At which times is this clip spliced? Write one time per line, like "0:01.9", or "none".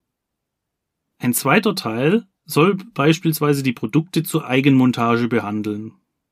0:01.1
0:02.3